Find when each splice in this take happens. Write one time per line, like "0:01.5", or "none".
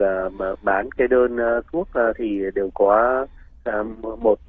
none